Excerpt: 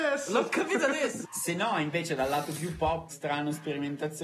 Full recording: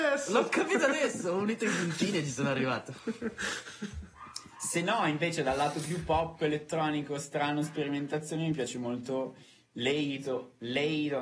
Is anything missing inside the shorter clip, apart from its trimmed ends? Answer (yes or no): yes